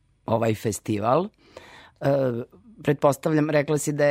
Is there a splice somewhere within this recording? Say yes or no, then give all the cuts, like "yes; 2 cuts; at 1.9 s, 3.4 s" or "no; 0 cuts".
no; 0 cuts